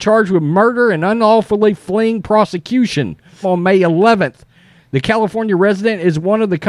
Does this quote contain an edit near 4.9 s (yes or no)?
no